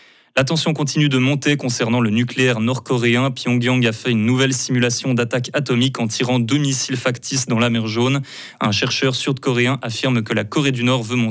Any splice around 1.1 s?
no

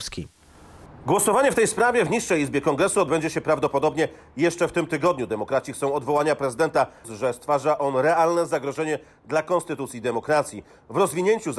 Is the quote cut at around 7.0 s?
yes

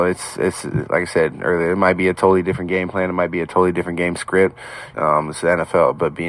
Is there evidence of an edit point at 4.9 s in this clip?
yes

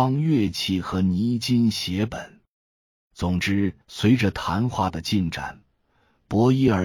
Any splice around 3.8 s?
yes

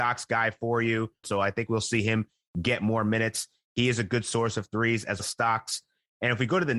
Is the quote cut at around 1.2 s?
yes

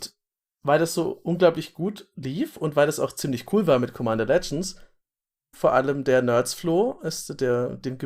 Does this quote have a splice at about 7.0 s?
no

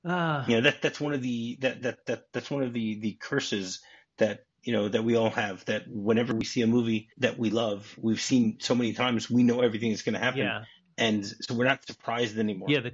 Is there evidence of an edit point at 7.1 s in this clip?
yes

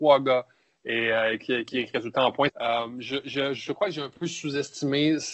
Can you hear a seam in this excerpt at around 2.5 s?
yes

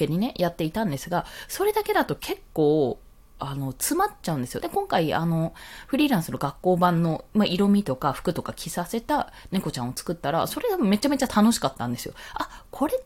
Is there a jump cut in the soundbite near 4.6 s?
yes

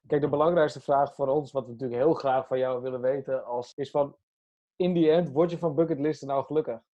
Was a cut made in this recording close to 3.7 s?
yes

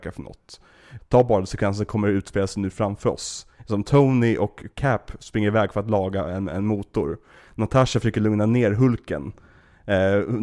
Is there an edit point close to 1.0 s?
yes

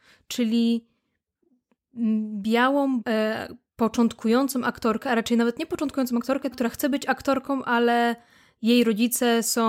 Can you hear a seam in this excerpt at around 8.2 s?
no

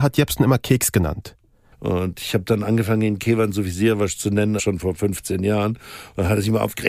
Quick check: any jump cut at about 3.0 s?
no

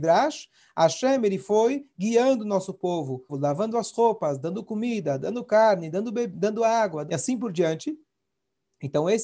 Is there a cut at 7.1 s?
yes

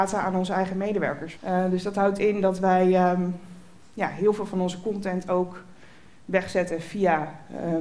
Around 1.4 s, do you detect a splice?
yes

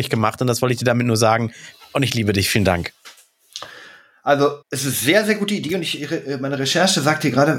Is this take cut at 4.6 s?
yes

